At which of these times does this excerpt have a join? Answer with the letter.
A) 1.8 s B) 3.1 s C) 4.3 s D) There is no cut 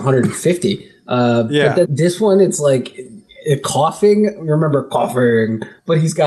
A